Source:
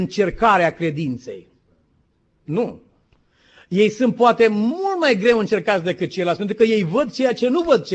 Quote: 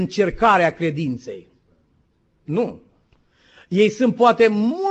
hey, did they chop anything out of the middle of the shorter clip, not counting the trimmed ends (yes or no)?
no